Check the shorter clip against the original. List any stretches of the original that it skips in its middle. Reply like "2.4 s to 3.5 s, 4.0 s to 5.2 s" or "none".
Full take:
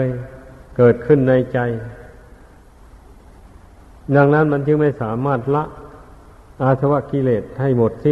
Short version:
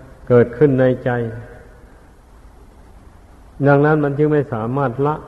none